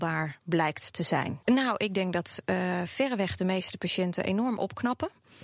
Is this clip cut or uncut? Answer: cut